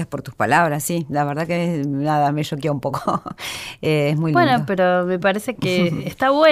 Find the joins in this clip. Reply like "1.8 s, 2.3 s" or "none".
5.6 s